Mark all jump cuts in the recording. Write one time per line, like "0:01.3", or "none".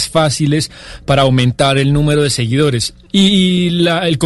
0:03.1